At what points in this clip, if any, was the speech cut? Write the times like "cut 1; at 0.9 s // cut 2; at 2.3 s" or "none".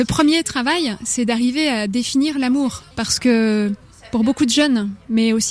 cut 1; at 2.9 s